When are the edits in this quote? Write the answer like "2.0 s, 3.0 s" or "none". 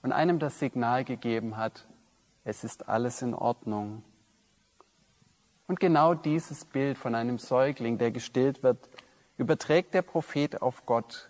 none